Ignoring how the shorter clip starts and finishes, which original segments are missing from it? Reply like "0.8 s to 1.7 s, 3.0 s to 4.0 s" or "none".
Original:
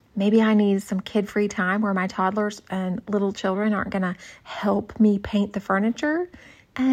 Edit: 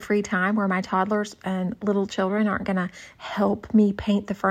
none